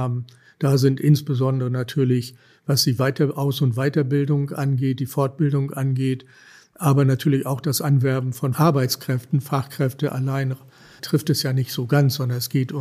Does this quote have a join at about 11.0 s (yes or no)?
yes